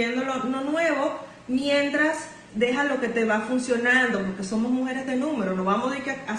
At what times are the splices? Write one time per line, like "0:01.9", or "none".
0:02.5

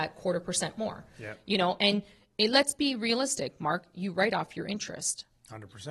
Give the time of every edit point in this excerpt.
none

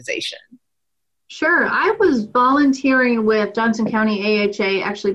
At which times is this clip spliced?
none

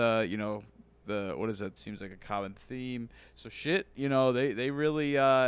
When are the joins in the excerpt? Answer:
0:01.8

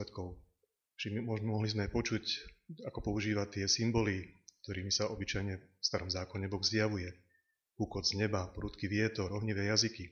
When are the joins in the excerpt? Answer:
0:00.9

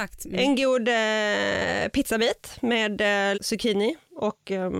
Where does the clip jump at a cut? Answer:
0:03.3

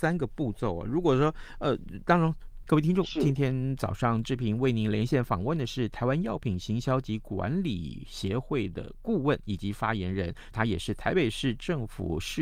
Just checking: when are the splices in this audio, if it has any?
0:02.6
0:10.5

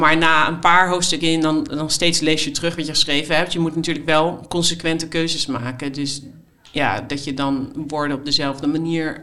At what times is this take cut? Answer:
none

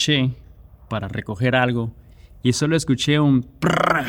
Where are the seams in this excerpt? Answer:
none

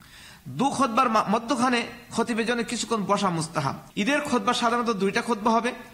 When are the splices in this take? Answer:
0:03.9

